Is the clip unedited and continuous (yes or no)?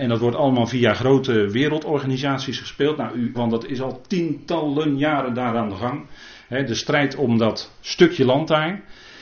no